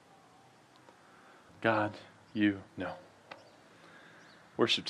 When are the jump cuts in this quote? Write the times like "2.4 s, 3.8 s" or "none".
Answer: 1.5 s, 2.7 s